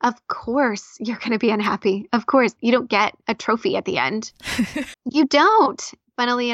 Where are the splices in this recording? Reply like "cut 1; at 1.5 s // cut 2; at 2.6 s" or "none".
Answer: cut 1; at 2.6 s // cut 2; at 4.9 s